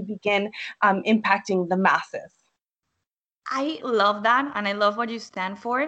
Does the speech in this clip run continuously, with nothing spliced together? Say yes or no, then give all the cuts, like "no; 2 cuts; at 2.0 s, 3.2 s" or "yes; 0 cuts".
no; 1 cut; at 3.8 s